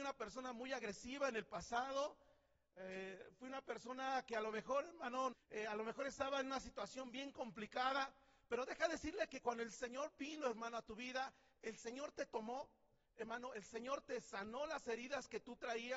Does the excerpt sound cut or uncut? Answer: cut